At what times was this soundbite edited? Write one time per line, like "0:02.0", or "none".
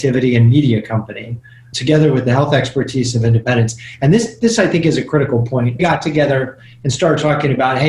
0:05.8